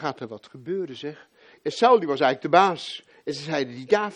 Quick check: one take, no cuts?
no; 1 cut; at 1.5 s

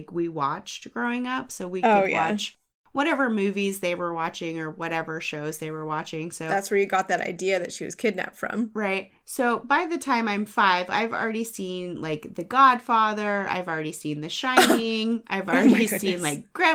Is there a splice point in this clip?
no; 0 cuts

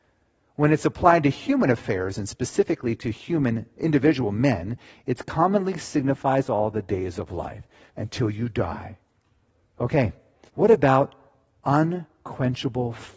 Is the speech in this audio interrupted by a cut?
yes; 2 cuts; at 7.9 s, 10.5 s

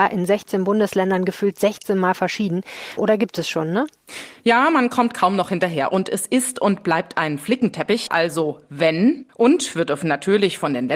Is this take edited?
yes; 3 cuts; at 3.0 s, 8.1 s, 9.2 s

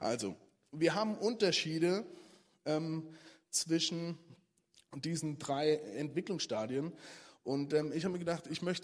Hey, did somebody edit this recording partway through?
no; 0 cuts

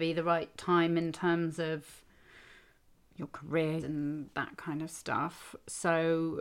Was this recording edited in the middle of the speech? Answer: yes; 1 cut; at 3.8 s

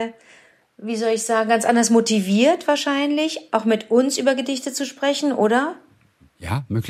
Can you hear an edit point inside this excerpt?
no; 0 cuts

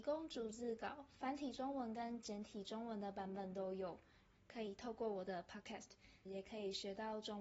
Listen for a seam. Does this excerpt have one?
yes; 2 cuts; at 4.3 s, 6.3 s

